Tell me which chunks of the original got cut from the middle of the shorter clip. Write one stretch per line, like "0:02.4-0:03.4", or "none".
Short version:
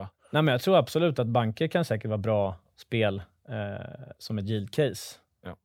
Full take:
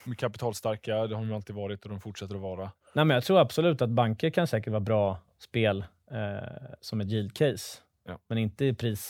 none